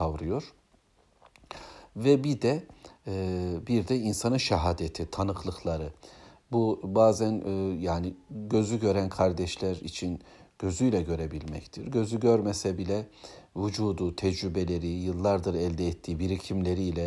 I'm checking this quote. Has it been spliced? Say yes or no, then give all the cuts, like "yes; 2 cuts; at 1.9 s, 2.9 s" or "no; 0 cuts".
no; 0 cuts